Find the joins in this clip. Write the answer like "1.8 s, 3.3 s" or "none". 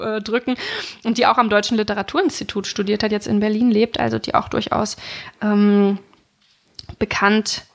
none